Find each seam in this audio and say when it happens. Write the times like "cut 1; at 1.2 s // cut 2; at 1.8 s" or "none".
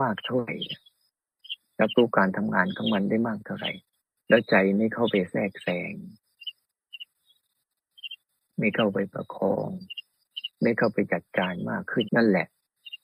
cut 1; at 12.0 s